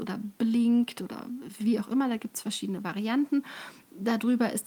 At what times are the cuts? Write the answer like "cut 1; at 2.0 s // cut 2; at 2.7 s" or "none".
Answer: none